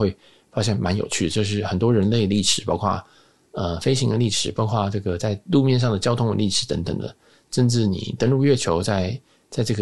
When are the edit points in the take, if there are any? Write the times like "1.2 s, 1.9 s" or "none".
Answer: none